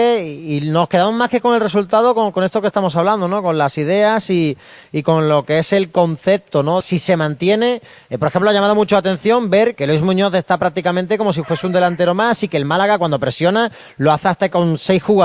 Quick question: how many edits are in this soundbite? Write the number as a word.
two